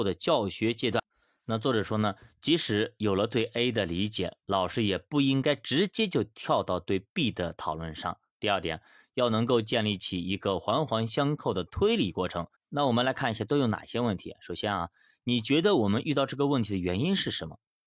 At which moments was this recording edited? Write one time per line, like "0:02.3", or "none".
0:12.5